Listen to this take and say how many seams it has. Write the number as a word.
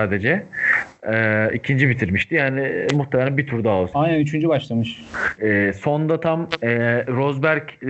two